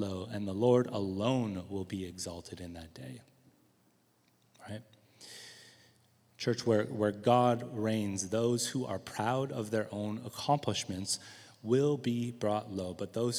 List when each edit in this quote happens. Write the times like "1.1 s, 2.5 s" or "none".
none

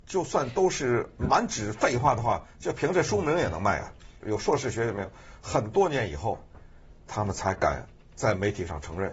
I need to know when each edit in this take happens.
4.2 s

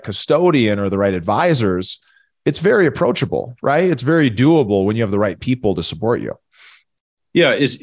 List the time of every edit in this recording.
none

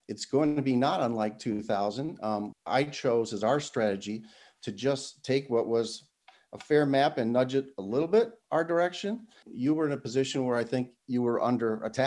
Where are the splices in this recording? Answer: 2.5 s, 9.4 s

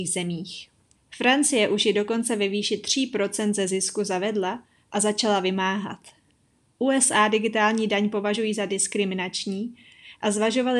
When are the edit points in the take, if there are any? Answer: 1.0 s

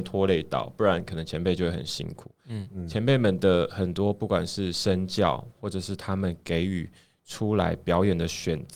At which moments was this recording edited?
2.4 s

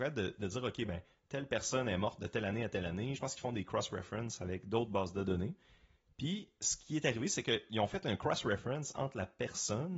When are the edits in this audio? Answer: none

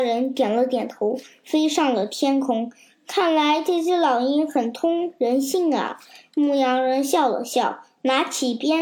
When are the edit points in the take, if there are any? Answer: none

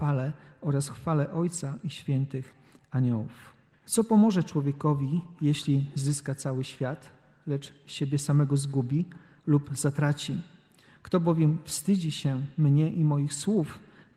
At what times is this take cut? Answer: 3.7 s

